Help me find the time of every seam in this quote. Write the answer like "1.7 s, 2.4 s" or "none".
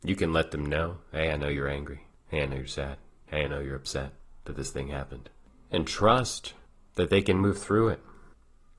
none